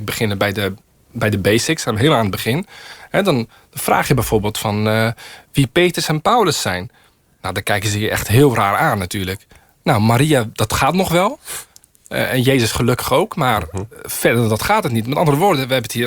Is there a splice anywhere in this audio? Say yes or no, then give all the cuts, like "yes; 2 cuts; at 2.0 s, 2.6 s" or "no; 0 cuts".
no; 0 cuts